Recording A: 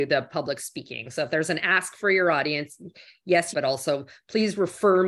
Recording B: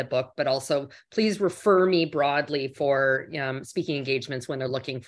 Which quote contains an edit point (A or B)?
A